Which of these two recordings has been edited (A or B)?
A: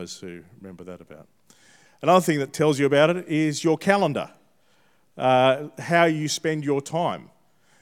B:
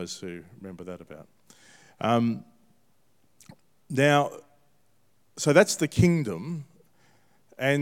A